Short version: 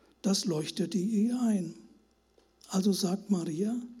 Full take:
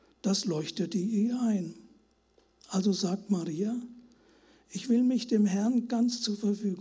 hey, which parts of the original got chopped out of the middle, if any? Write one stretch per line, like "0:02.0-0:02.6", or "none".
none